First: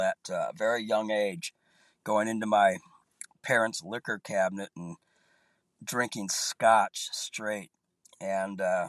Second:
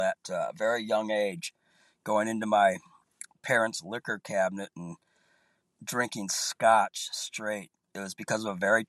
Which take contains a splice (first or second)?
second